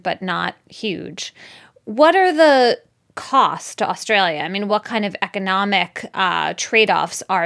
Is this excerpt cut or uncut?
uncut